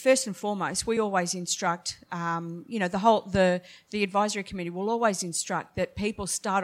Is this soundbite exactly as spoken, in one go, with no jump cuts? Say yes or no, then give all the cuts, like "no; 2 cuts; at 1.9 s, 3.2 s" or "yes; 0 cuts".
yes; 0 cuts